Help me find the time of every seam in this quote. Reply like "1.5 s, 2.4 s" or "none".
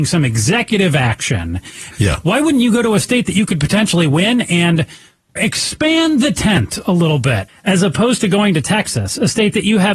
1.9 s, 5.4 s, 7.5 s